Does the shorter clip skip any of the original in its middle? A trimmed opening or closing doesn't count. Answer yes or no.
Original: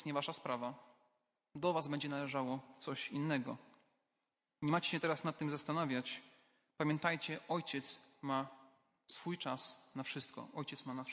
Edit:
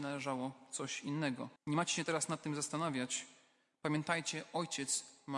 yes